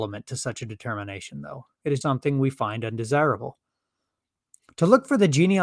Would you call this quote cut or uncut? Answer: cut